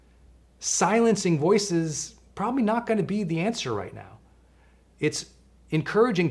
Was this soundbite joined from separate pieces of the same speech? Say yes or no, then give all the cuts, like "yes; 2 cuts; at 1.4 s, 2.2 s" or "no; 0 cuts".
no; 0 cuts